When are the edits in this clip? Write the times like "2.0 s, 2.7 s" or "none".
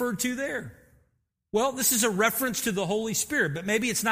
none